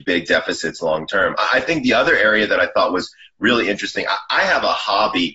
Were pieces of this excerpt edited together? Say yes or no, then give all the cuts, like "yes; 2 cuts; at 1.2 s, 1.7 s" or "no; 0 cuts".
no; 0 cuts